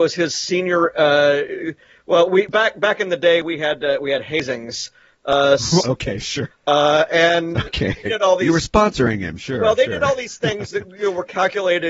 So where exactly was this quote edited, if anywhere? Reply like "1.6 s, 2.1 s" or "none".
6.5 s, 8.1 s